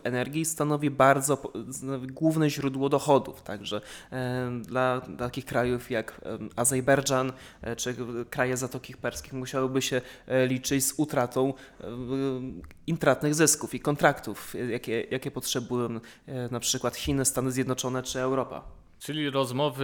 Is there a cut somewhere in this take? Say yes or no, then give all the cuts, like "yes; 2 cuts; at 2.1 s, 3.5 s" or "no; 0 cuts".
no; 0 cuts